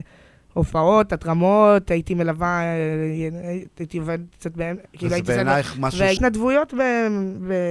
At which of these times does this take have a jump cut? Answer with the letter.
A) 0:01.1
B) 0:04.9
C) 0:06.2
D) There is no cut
C